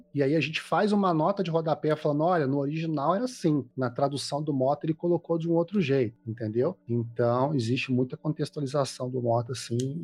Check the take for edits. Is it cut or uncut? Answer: uncut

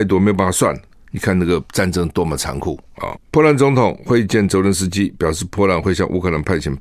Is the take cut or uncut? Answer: uncut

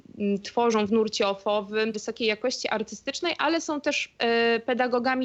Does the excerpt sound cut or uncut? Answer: cut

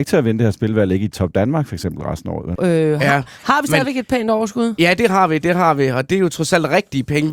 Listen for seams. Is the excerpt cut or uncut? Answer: cut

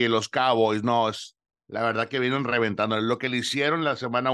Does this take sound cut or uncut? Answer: uncut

